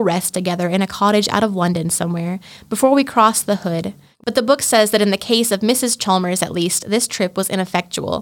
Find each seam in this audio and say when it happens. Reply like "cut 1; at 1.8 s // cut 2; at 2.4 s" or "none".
cut 1; at 4.1 s